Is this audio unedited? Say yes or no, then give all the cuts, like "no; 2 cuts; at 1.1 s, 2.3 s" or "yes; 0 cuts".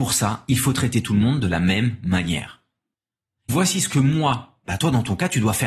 no; 2 cuts; at 3.5 s, 4.7 s